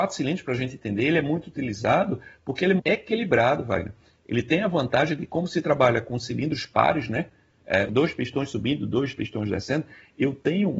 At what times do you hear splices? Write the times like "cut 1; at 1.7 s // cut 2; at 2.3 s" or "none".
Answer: cut 1; at 2.8 s // cut 2; at 7.9 s

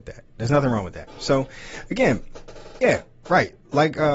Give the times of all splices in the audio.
none

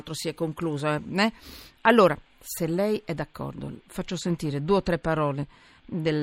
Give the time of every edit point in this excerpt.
none

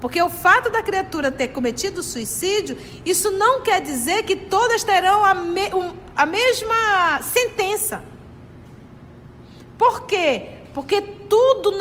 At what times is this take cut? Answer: cut 1; at 6.1 s

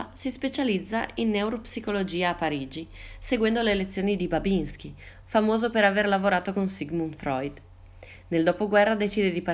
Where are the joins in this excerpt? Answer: cut 1; at 5.2 s

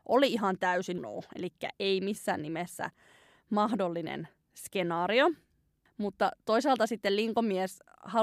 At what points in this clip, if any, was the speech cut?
cut 1; at 1.0 s

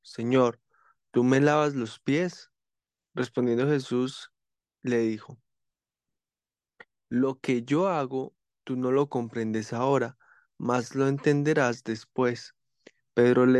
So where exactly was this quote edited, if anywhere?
none

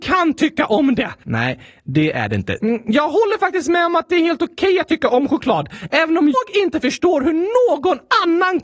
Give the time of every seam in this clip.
cut 1; at 1.2 s // cut 2; at 2.6 s // cut 3; at 6.3 s

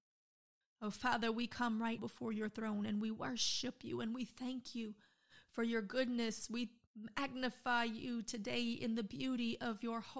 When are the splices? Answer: cut 1; at 2.0 s

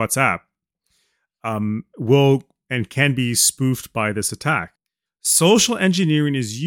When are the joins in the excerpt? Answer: cut 1; at 5.1 s

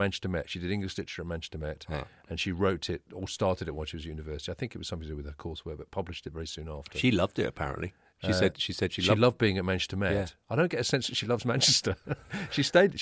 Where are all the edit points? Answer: none

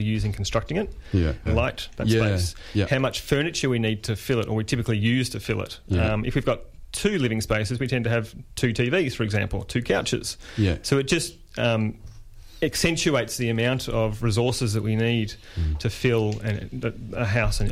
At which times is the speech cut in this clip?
cut 1; at 1.5 s

